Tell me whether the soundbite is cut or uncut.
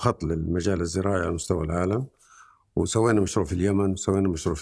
uncut